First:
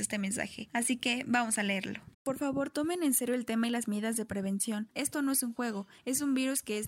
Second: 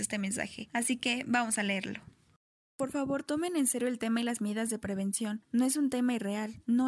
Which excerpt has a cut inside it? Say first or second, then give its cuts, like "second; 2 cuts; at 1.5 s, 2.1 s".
first; 2 cuts; at 2.1 s, 4.9 s